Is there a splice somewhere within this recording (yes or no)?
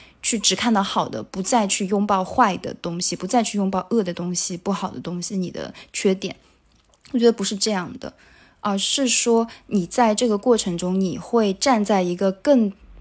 no